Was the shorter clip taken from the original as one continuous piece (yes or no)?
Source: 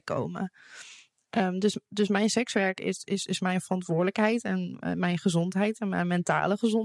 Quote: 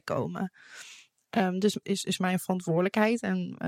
no